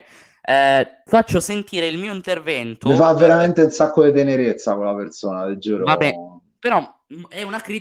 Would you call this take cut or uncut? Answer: uncut